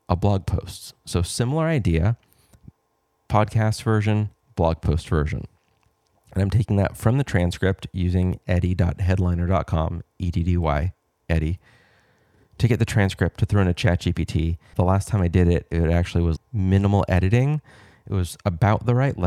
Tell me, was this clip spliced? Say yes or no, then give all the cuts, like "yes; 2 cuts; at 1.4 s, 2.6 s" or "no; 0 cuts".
yes; 2 cuts; at 14.7 s, 16.4 s